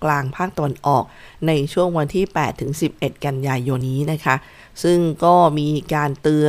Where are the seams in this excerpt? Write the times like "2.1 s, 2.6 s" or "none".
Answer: 3.8 s

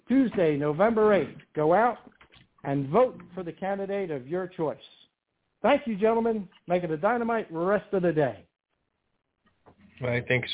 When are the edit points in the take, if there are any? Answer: none

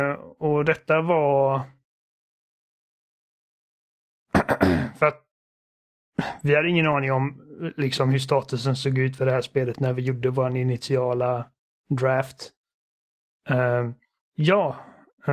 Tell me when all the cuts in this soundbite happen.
14.2 s

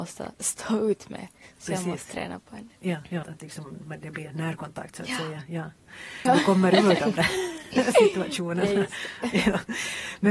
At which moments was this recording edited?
3.2 s, 6.3 s

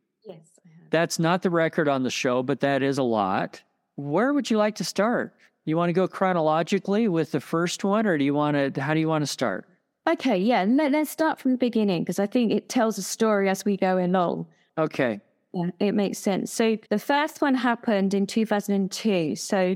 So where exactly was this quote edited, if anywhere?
16.8 s

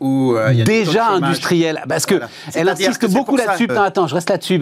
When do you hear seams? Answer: 3.7 s

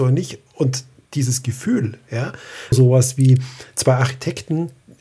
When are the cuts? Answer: 2.7 s

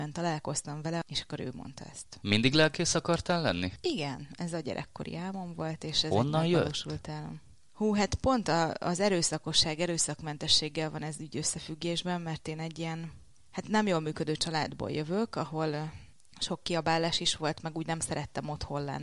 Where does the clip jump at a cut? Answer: none

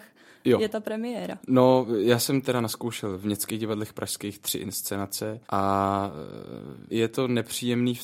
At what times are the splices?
5.4 s, 6.9 s

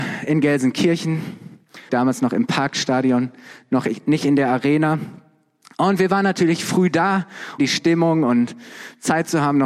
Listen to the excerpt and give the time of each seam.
1.9 s, 7.6 s

